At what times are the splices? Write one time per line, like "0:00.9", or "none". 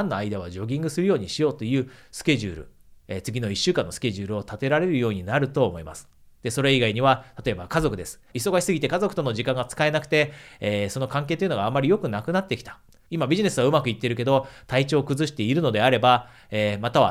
0:08.3
0:13.1